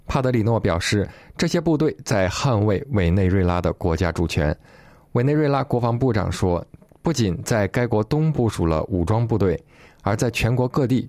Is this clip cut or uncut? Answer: cut